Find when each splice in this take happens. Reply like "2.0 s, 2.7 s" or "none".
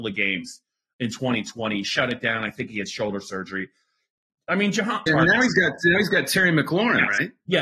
5.1 s